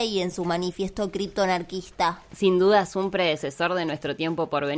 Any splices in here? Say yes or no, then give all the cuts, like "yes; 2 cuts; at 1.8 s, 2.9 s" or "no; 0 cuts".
no; 0 cuts